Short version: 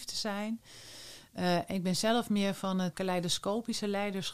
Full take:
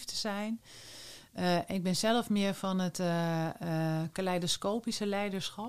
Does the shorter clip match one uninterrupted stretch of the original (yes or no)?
no